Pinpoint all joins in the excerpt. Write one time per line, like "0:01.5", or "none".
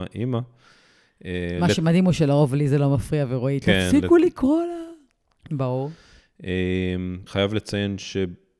0:05.5
0:07.3